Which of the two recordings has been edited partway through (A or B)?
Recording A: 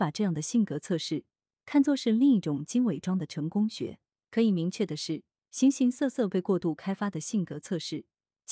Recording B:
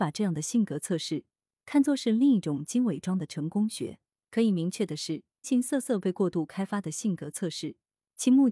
B